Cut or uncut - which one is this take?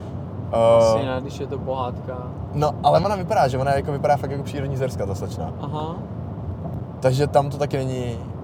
uncut